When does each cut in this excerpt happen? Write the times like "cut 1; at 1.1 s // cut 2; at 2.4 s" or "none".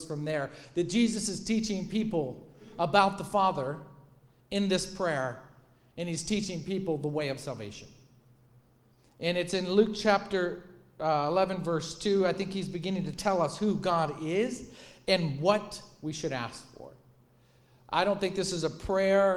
none